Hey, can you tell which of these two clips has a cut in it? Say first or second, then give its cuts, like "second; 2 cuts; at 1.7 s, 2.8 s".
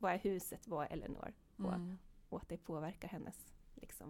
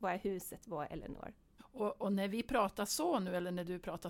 second; 1 cut; at 1.6 s